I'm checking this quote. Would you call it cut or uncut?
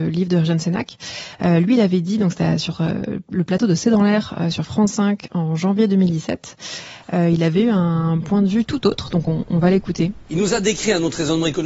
uncut